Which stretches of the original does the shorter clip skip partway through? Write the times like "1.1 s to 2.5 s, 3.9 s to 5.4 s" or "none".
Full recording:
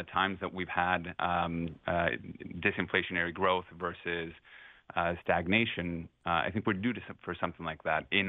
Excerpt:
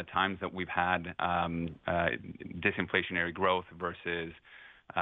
none